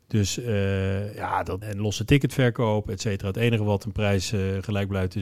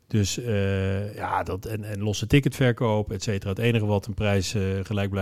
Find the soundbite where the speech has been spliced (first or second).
first